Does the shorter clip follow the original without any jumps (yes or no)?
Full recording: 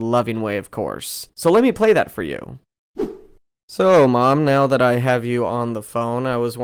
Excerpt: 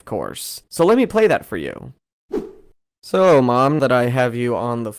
no